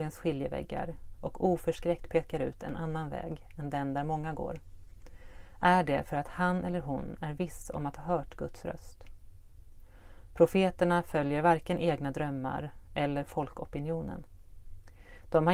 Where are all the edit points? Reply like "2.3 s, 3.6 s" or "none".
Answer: none